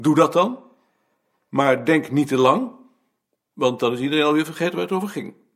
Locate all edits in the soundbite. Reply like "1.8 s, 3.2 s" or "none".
none